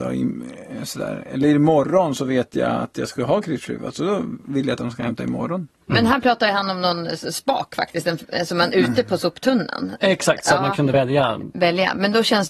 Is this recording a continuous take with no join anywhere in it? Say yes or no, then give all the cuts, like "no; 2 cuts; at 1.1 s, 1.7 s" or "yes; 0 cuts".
yes; 0 cuts